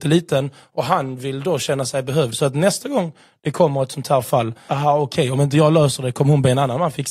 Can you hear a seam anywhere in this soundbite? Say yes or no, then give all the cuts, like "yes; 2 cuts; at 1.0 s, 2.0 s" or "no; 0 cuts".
yes; 1 cut; at 4.7 s